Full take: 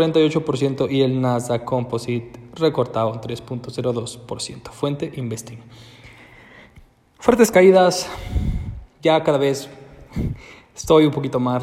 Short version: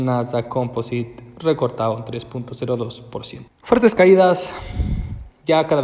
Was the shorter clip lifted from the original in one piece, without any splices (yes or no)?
no